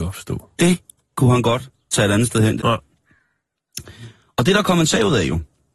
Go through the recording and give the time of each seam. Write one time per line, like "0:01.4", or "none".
0:02.6